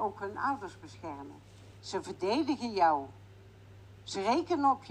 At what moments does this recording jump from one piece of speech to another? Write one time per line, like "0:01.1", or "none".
0:01.8